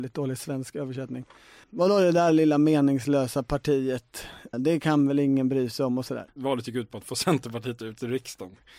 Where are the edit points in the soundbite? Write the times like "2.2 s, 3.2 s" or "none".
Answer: 1.6 s, 4.5 s, 6.3 s